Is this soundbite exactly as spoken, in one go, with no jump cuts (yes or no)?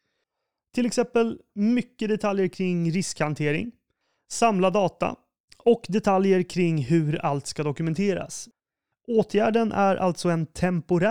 no